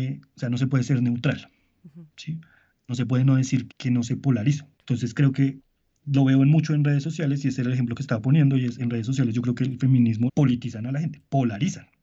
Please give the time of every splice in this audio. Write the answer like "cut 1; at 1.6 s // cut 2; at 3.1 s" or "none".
cut 1; at 3.7 s // cut 2; at 10.3 s